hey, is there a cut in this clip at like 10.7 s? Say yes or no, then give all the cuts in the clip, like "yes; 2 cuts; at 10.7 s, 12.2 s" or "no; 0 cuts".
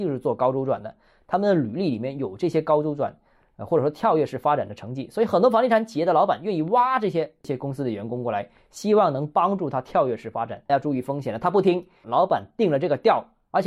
yes; 2 cuts; at 10.7 s, 12.0 s